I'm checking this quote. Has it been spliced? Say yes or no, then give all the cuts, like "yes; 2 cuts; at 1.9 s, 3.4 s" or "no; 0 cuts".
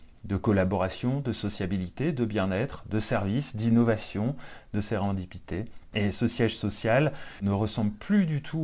no; 0 cuts